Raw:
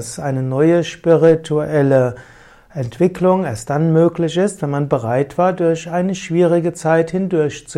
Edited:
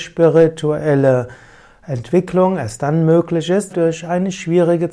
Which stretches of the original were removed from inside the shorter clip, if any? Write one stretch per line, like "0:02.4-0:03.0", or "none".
0:04.6-0:05.5